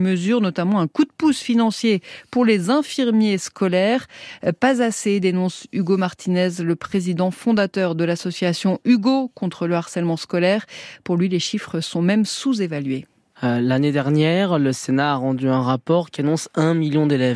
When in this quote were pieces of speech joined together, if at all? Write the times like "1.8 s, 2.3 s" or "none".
13.3 s